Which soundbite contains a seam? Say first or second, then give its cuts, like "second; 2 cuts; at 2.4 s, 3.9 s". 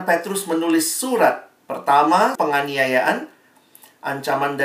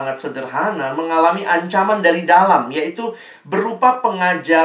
first; 1 cut; at 2.3 s